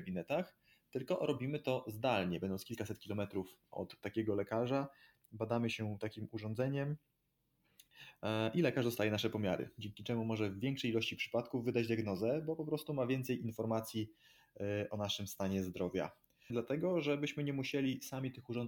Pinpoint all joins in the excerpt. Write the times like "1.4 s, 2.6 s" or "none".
16.5 s